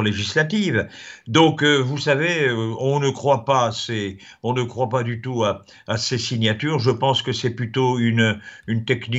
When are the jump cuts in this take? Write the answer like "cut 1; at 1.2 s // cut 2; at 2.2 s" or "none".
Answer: none

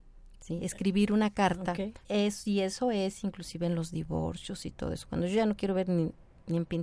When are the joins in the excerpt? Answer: cut 1; at 2.0 s

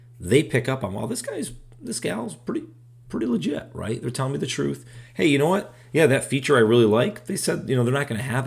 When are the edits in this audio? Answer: none

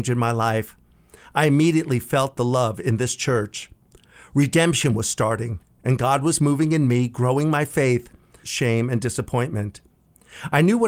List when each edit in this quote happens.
cut 1; at 8.4 s

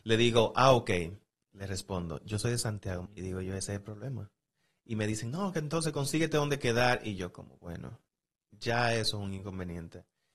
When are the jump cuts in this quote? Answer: cut 1; at 3.1 s

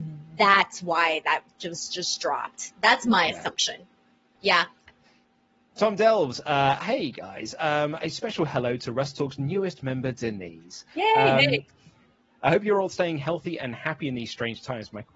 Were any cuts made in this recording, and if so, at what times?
cut 1; at 4.4 s

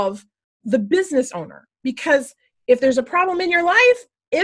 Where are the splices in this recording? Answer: none

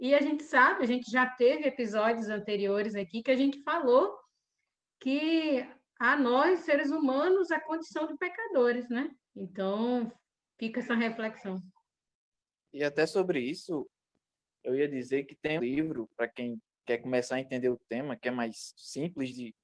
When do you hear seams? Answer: cut 1; at 9.3 s // cut 2; at 15.6 s

